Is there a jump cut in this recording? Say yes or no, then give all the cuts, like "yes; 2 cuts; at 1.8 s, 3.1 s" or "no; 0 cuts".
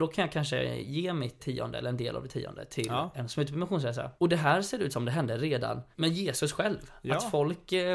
yes; 3 cuts; at 1.4 s, 4.2 s, 5.9 s